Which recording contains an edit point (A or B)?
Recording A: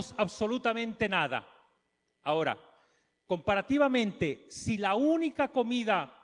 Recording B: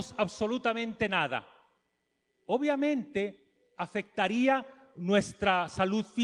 A